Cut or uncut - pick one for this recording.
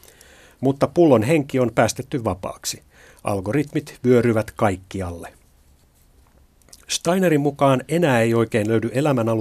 uncut